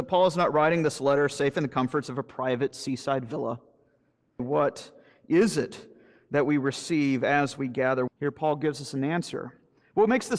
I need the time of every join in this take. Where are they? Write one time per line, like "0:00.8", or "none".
0:04.4
0:08.1